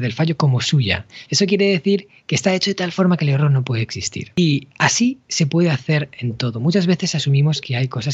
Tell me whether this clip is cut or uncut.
cut